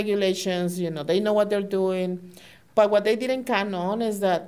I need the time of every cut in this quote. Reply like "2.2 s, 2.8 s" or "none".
none